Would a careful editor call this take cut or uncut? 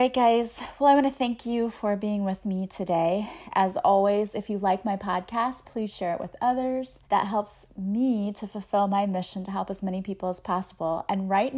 cut